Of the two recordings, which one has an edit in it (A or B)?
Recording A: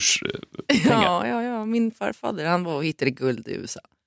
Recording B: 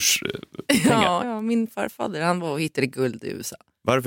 B